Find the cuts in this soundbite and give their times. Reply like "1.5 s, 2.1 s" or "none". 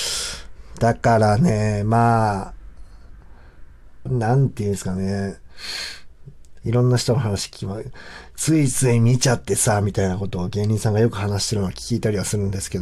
4.1 s, 6.6 s